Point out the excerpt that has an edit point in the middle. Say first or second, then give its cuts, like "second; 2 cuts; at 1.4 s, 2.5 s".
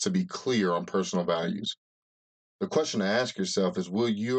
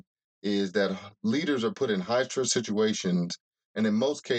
first; 1 cut; at 2.5 s